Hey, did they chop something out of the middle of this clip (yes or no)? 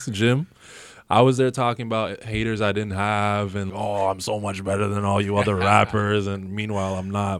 yes